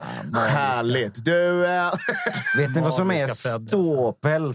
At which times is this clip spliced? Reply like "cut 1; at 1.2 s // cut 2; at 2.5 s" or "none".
none